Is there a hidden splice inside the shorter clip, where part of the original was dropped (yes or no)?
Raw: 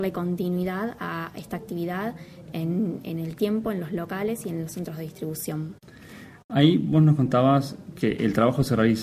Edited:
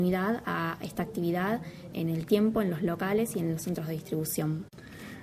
yes